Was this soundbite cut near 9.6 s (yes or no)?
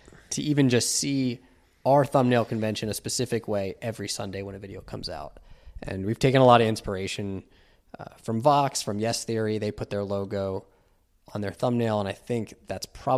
no